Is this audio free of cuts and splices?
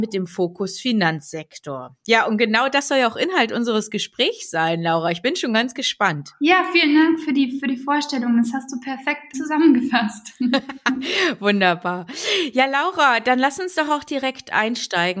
no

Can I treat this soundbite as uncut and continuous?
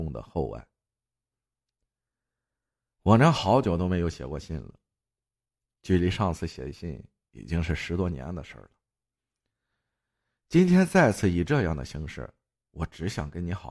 yes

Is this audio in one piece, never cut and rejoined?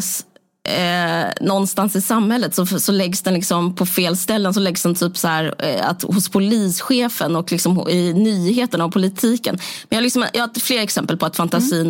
yes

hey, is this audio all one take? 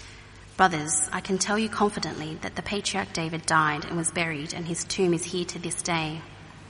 yes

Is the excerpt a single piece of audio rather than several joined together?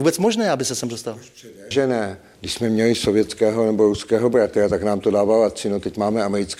yes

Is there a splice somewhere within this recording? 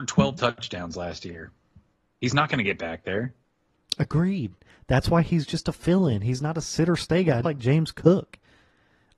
yes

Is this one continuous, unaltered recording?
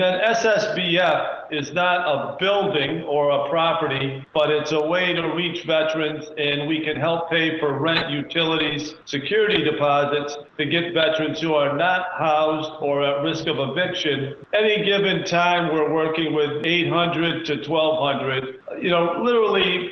yes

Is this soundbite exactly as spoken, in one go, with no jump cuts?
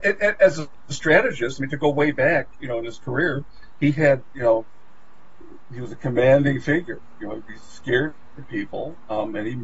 yes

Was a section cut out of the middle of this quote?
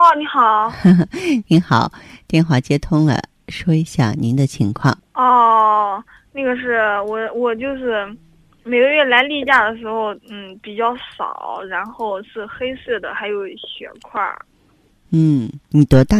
no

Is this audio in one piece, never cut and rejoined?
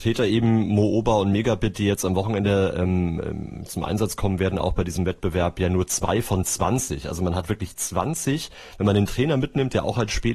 yes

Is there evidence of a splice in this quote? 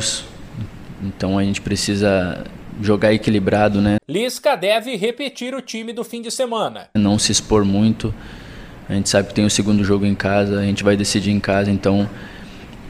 yes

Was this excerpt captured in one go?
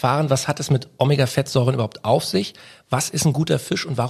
yes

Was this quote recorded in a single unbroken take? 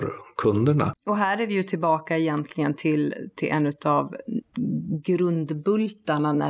yes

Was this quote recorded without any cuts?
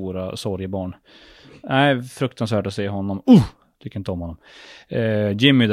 yes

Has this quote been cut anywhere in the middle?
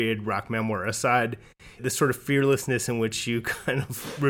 yes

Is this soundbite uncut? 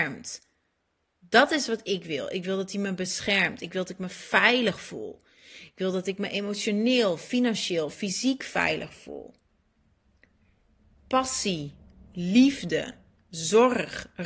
yes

